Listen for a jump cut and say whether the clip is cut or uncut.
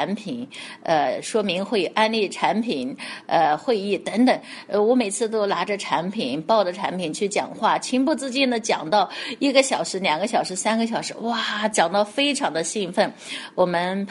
uncut